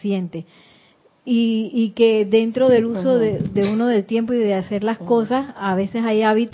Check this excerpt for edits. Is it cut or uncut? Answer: uncut